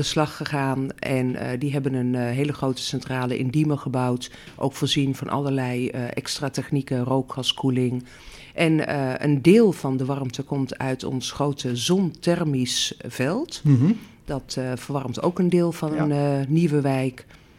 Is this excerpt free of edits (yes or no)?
yes